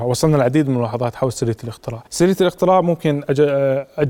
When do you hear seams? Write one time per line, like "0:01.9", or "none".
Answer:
0:02.1